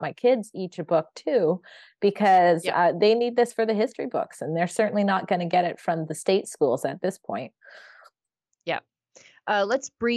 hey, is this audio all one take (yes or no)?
yes